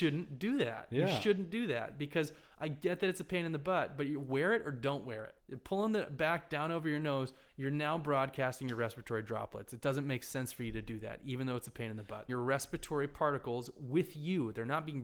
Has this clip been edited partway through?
yes; 2 cuts; at 5.4 s, 12.3 s

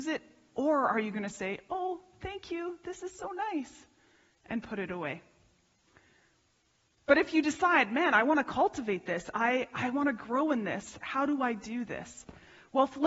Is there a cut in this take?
no; 0 cuts

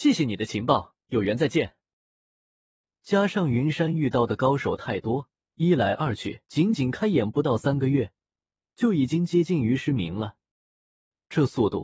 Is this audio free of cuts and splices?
no; 2 cuts; at 2.9 s, 6.4 s

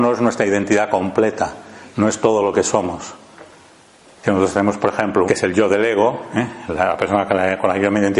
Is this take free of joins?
no; 2 cuts; at 4.2 s, 5.3 s

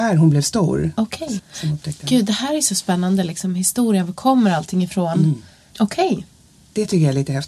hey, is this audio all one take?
no; 2 cuts; at 1.4 s, 5.7 s

